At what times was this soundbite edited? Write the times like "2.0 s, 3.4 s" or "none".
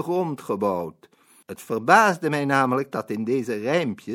1.4 s